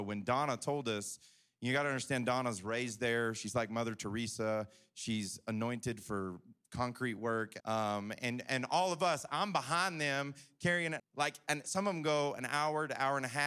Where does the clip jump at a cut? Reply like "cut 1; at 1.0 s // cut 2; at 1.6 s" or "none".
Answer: cut 1; at 7.6 s // cut 2; at 11.0 s